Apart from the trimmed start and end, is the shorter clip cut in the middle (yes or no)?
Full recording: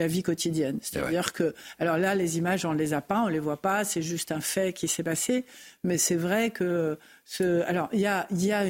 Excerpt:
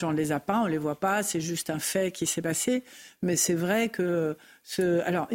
no